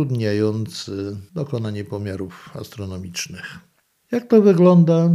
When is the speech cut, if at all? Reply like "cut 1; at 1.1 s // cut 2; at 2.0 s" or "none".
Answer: none